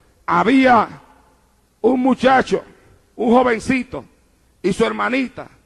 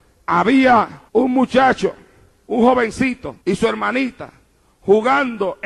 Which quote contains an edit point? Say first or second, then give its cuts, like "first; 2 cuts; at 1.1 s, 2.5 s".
second; 2 cuts; at 1.1 s, 3.4 s